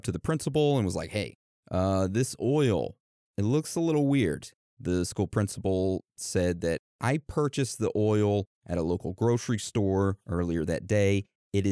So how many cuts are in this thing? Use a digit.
0